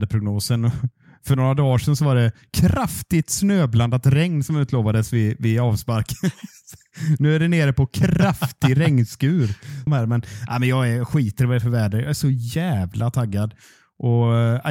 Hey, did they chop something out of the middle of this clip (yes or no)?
yes